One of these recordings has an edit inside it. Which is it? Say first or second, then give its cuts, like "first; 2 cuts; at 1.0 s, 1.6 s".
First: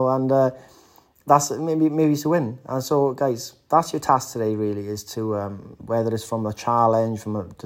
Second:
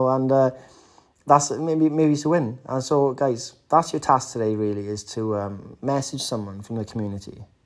first; 1 cut; at 5.8 s